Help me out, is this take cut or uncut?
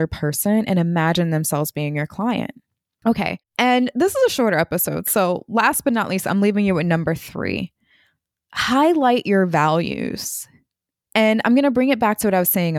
uncut